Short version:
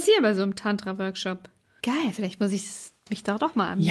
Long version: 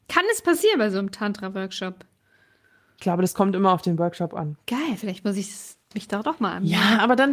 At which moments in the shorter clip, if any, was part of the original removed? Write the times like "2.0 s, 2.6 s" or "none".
1.8 s